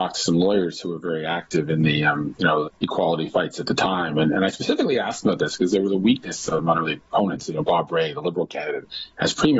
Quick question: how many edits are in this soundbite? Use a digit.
1